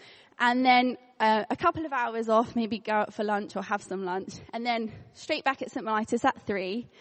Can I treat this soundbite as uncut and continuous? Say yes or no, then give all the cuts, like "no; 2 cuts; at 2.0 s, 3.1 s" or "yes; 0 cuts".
yes; 0 cuts